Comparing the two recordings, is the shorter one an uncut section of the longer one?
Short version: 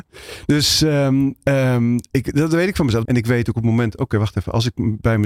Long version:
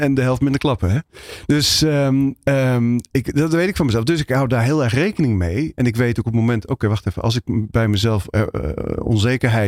no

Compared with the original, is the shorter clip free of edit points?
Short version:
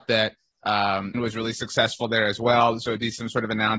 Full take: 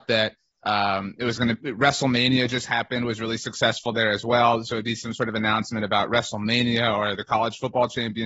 no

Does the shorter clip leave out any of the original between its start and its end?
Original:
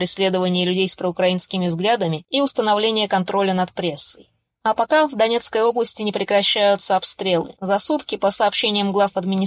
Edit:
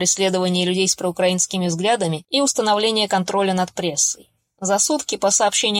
yes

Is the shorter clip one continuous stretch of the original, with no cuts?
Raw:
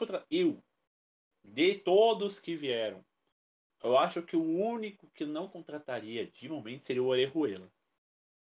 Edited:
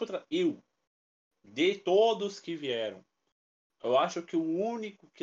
yes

